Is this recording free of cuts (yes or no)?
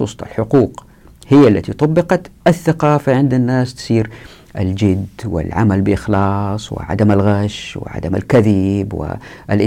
no